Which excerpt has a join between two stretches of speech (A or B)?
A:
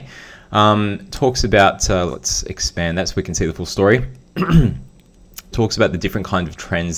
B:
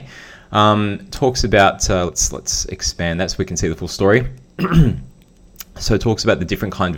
A